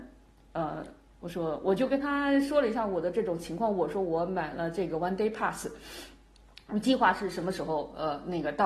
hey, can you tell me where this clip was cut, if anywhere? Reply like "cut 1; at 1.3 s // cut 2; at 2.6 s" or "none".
none